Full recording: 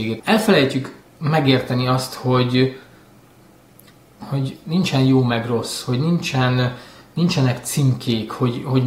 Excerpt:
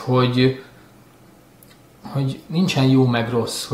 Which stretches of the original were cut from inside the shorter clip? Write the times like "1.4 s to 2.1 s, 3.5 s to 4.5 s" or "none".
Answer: none